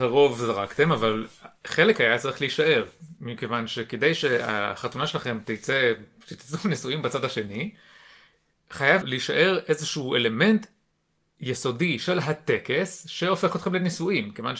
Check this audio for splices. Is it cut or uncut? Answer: cut